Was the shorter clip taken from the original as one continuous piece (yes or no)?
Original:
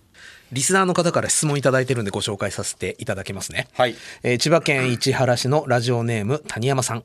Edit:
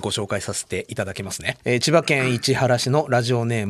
no